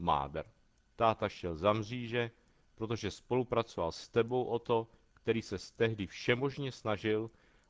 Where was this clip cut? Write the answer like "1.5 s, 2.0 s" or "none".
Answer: none